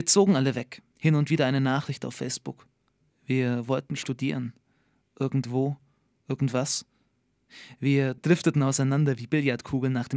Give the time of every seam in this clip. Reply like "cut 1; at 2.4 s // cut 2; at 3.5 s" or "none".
cut 1; at 0.9 s // cut 2; at 3.1 s